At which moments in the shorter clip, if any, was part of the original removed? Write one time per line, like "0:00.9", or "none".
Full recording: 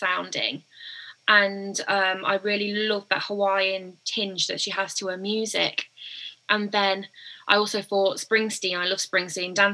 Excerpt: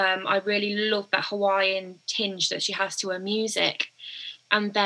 none